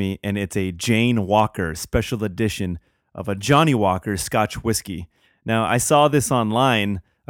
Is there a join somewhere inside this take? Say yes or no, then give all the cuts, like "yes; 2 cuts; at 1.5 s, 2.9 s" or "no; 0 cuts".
no; 0 cuts